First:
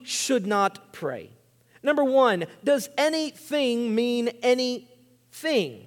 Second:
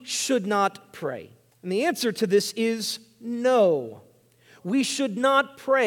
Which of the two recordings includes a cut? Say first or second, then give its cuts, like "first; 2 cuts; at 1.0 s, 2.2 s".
second; 1 cut; at 1.5 s